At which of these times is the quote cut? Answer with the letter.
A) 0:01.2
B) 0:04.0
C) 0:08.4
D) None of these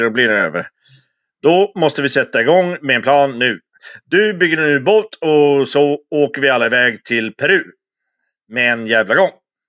D